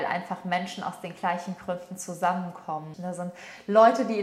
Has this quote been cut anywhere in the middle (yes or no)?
yes